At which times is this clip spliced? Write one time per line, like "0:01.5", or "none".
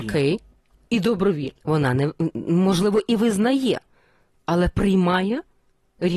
0:01.6